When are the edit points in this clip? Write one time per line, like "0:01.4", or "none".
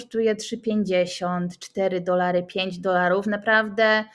none